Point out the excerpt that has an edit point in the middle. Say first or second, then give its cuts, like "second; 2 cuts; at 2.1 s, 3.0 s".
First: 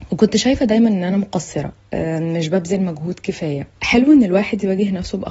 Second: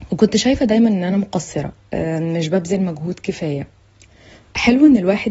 first; 1 cut; at 3.7 s